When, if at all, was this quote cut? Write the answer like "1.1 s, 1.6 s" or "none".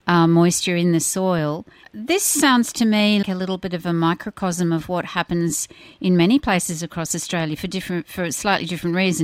1.8 s, 3.2 s

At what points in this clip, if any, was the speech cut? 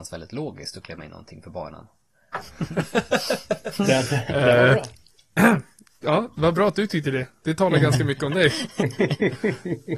2.3 s

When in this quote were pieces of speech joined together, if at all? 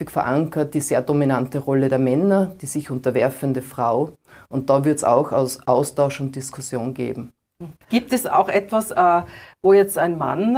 7.8 s

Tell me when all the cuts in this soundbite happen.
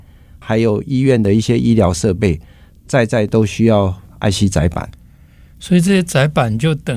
none

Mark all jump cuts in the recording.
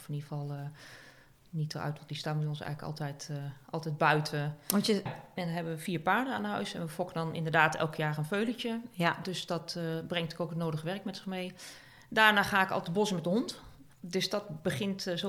5.1 s, 13.9 s

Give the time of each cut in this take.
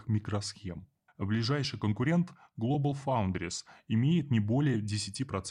1.1 s

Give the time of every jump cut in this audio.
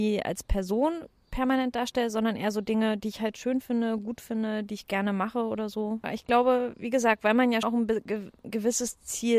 6.0 s, 7.6 s

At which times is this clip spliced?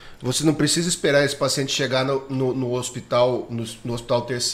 2.5 s

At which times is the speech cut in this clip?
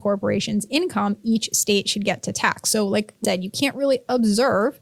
3.2 s

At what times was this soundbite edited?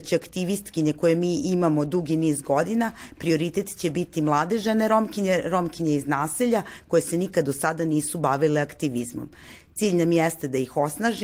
none

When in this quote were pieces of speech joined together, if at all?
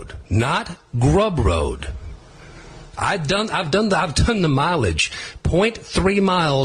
none

